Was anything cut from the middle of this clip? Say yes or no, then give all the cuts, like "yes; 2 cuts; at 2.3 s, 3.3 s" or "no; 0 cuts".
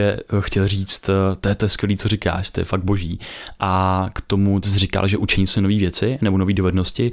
no; 0 cuts